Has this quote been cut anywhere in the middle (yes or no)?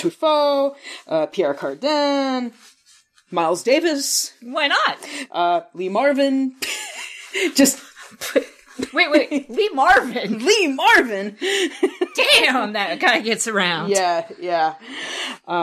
no